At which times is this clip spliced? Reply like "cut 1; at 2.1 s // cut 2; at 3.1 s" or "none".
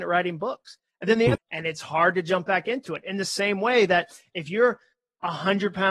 cut 1; at 1.4 s